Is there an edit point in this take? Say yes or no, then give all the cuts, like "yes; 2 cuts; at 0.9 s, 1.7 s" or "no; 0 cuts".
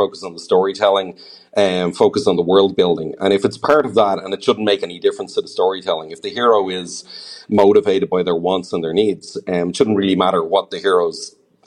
no; 0 cuts